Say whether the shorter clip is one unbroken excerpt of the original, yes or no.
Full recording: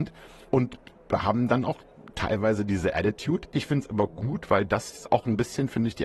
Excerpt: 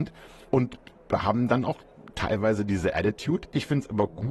yes